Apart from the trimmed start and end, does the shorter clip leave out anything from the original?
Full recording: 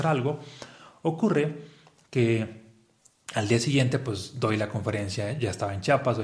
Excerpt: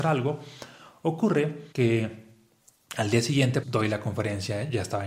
yes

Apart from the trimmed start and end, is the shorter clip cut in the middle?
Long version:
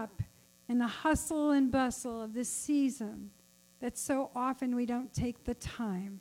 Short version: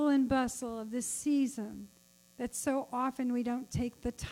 no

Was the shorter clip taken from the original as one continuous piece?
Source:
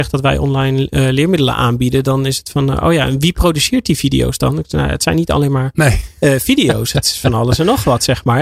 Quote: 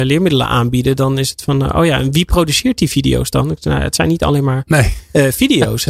yes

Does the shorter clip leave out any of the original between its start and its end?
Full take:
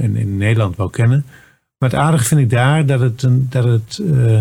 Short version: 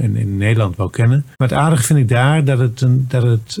yes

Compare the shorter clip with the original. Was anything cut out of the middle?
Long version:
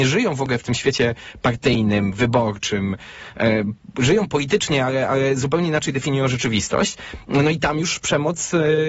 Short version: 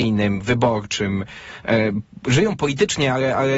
no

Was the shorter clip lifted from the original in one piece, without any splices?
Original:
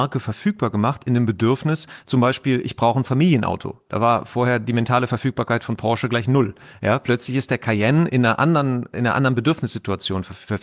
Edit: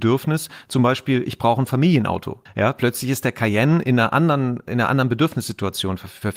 no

